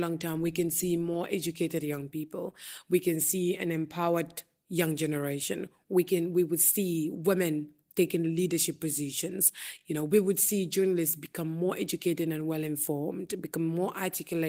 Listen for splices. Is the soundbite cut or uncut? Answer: uncut